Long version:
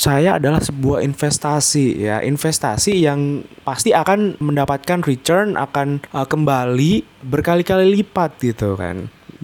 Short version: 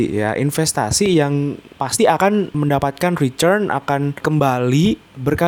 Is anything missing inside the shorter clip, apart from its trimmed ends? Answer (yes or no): yes